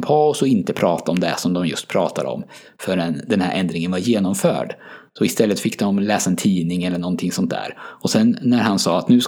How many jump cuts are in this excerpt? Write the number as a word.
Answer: zero